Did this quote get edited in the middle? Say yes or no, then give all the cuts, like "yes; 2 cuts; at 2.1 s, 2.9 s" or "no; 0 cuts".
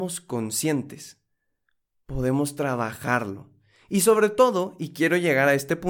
no; 0 cuts